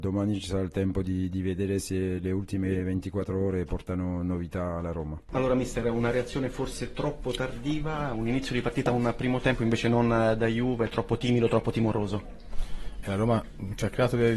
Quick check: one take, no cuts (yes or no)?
no